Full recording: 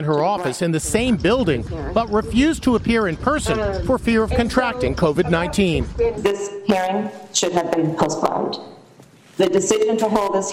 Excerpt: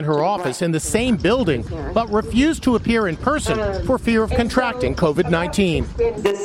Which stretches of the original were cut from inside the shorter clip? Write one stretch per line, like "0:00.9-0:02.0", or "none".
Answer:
none